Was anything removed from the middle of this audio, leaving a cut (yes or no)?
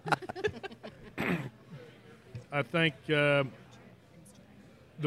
no